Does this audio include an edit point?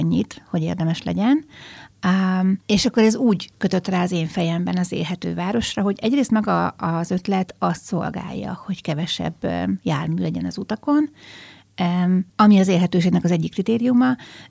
yes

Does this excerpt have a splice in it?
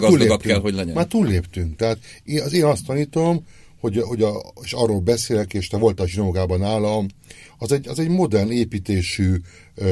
no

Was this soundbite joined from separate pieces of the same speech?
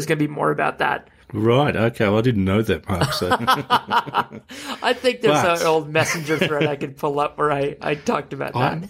no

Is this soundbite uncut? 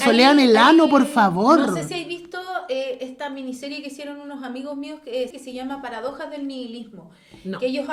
no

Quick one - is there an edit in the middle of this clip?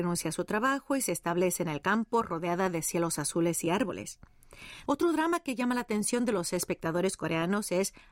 yes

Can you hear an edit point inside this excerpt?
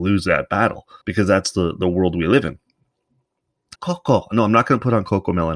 yes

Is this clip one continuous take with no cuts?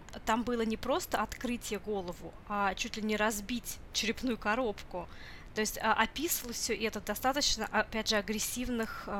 yes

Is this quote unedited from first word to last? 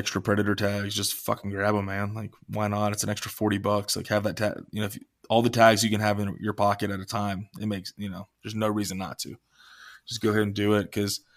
yes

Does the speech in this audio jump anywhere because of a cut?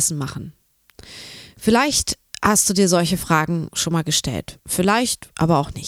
no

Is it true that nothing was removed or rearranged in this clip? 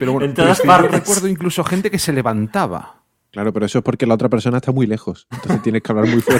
yes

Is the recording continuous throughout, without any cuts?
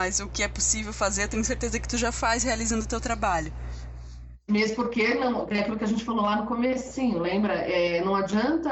yes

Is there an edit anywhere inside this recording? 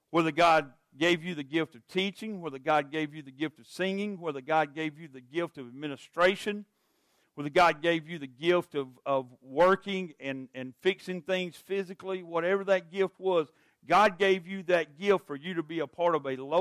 no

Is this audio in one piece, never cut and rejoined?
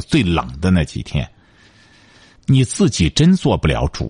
no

